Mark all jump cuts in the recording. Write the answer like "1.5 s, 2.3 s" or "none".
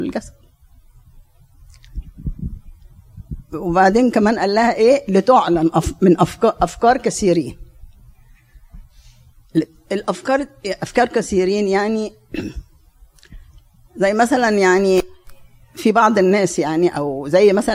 none